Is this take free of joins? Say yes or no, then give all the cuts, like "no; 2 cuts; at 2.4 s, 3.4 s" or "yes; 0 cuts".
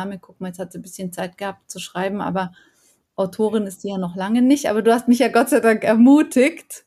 yes; 0 cuts